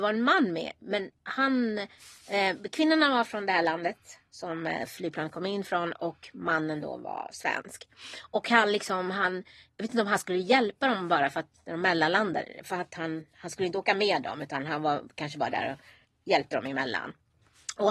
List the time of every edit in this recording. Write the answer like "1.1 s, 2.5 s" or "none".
none